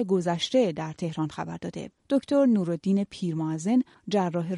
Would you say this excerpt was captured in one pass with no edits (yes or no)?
no